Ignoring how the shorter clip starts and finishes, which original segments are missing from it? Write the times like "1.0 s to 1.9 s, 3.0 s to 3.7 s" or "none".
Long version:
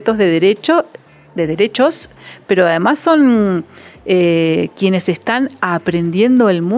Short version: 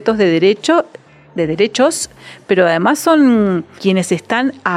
3.8 s to 4.7 s